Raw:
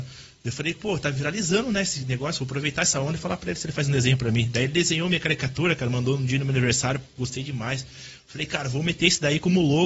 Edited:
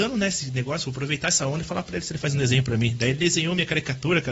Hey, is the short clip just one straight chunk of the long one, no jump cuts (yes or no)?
yes